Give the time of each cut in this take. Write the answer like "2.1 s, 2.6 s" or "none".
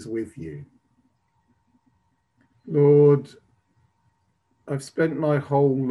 2.5 s